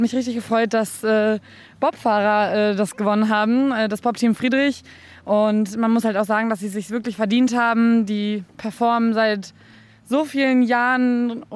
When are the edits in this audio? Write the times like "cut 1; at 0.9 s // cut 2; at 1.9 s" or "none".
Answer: none